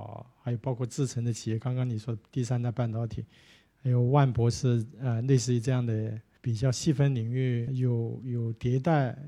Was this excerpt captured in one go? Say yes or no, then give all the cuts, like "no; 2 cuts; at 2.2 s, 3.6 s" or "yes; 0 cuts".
yes; 0 cuts